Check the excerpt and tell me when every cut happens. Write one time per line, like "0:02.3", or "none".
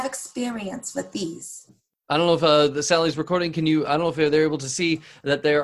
none